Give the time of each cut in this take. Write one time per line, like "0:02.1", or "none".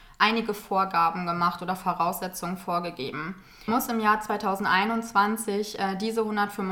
0:03.7